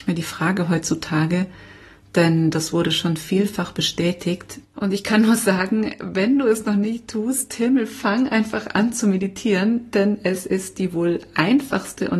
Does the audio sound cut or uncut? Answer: cut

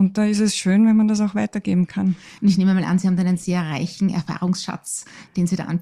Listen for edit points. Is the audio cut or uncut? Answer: cut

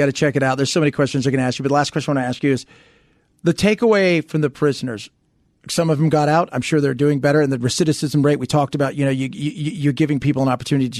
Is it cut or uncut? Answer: uncut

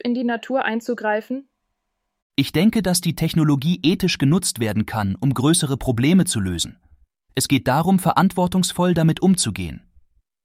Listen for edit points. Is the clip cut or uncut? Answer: uncut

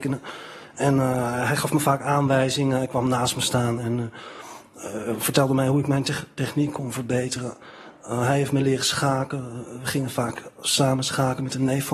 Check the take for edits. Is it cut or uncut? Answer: uncut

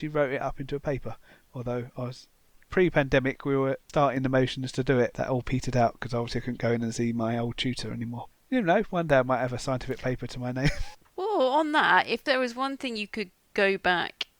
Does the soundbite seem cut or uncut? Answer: uncut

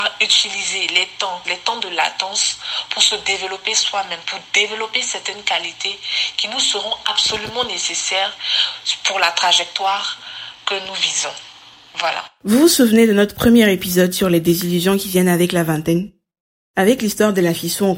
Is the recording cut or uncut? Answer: cut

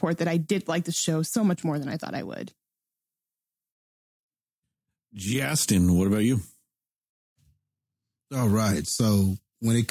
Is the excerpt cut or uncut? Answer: uncut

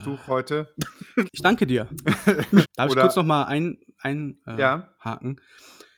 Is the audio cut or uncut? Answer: cut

